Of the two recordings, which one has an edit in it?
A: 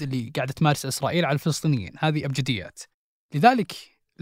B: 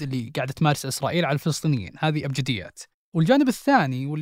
B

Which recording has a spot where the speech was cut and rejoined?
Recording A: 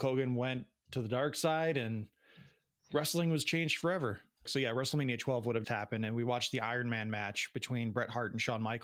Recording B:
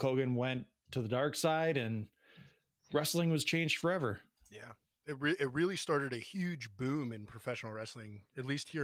A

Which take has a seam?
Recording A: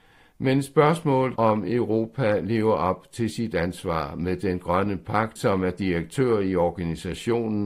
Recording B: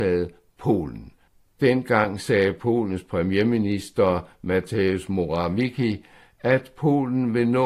A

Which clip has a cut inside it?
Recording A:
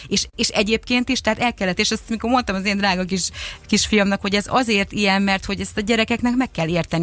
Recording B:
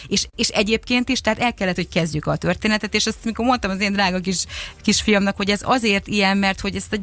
A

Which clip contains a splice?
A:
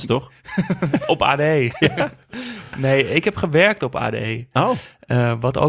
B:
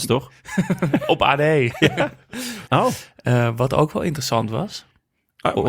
B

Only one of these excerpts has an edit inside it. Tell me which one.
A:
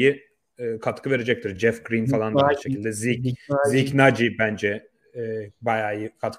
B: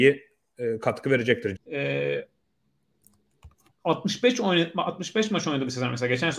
B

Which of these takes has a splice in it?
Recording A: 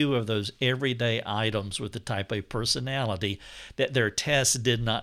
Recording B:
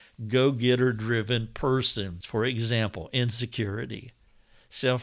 B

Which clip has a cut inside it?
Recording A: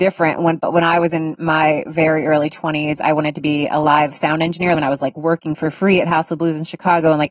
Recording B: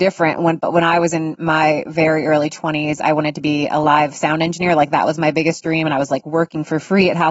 A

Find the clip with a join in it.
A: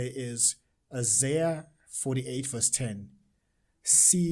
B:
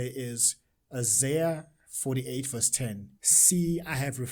B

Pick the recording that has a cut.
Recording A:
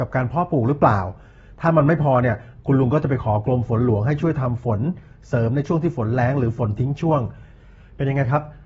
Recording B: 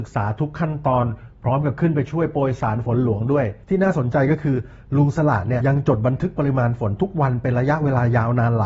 B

